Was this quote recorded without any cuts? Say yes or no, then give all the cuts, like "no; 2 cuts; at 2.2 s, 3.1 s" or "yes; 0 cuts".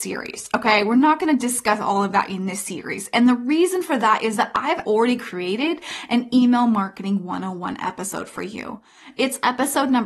no; 1 cut; at 4.8 s